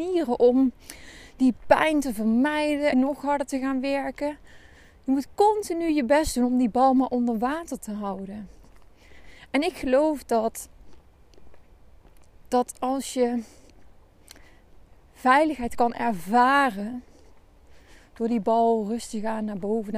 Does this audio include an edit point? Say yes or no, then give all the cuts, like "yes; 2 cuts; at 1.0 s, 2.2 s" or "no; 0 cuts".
yes; 1 cut; at 2.9 s